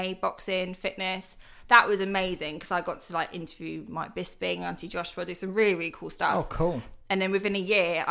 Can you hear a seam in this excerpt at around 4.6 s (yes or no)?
no